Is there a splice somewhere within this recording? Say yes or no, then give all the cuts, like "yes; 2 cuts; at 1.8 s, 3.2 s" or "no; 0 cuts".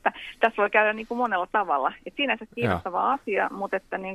no; 0 cuts